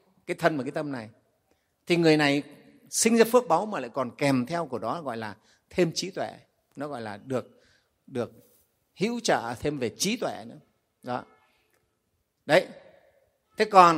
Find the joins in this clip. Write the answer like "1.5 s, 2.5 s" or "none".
none

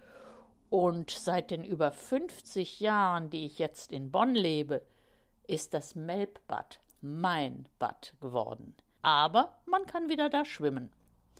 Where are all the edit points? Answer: 9.0 s

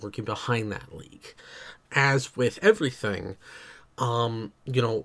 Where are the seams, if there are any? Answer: 1.8 s

